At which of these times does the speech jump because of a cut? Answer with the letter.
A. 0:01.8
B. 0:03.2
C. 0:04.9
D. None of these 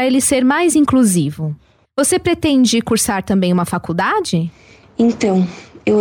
A